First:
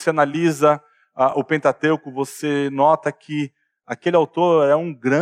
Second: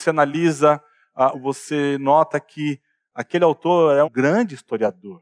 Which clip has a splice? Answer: second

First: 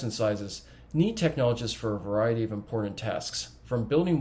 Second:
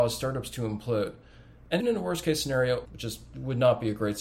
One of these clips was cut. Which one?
second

